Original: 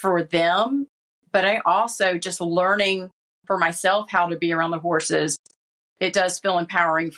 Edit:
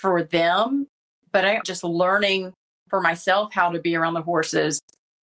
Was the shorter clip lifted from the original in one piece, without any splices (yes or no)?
no